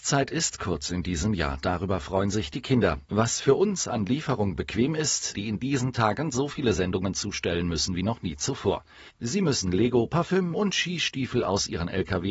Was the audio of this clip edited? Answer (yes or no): yes